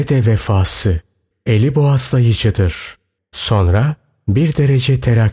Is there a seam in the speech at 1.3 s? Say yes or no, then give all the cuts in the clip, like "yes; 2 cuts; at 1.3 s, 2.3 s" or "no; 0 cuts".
yes; 2 cuts; at 1.3 s, 3.2 s